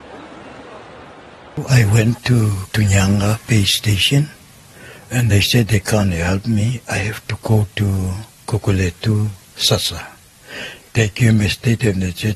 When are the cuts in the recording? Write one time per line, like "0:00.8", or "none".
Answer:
0:08.4
0:10.8